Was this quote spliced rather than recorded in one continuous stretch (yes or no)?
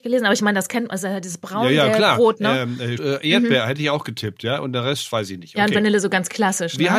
yes